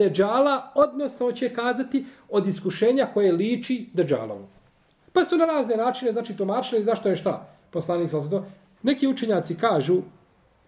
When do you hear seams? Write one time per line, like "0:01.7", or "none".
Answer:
0:08.8